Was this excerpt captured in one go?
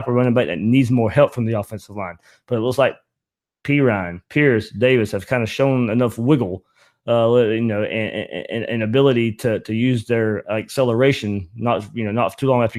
yes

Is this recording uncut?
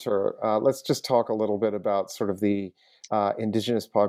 yes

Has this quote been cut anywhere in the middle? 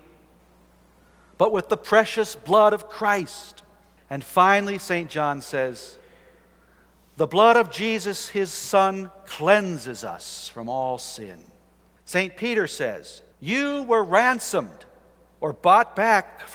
yes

